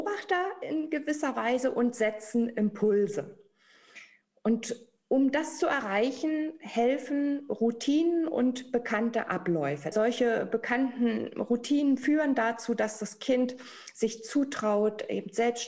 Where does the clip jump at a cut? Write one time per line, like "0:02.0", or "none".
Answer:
0:09.9